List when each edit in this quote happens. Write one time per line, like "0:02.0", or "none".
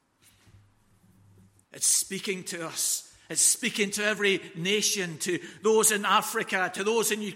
0:01.6